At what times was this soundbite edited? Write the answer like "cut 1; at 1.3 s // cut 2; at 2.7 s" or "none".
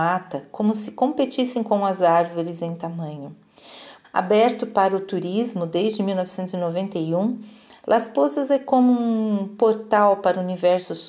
cut 1; at 4.0 s